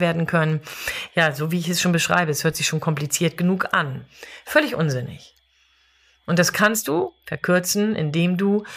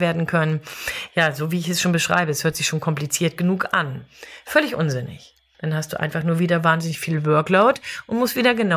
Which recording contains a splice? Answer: second; 1 cut; at 5.5 s

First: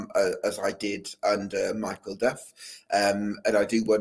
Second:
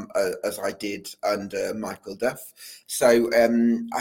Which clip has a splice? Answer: second; 1 cut; at 2.8 s

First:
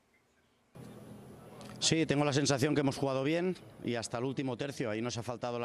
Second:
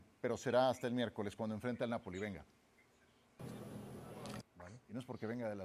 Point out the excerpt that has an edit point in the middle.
second; 1 cut; at 4.4 s

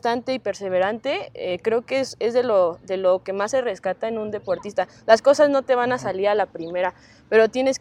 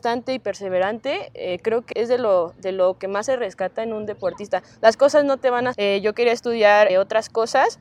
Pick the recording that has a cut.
second; 3 cuts; at 1.9 s, 5.7 s, 6.9 s

